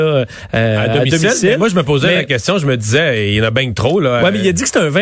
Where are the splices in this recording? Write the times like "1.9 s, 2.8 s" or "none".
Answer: none